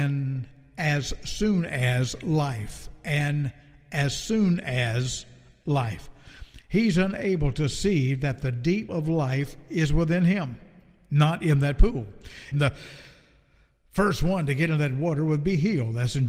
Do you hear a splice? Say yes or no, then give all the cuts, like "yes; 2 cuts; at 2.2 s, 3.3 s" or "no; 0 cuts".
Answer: yes; 2 cuts; at 8.9 s, 12.5 s